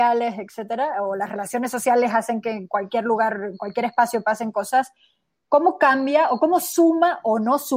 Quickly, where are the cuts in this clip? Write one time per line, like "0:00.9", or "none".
none